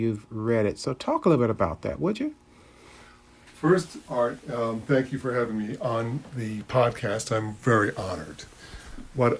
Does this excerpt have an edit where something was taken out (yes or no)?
no